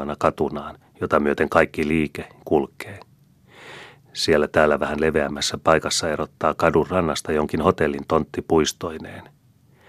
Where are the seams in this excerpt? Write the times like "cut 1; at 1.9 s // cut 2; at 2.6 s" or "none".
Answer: cut 1; at 2.4 s